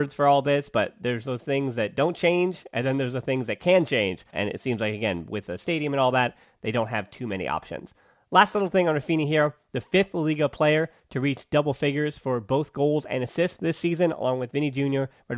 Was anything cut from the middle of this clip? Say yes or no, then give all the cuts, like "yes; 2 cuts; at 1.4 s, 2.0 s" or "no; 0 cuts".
yes; 1 cut; at 4.3 s